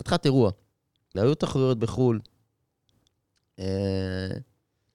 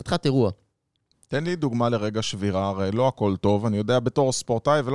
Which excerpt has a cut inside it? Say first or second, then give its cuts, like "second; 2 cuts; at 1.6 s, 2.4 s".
first; 1 cut; at 1.1 s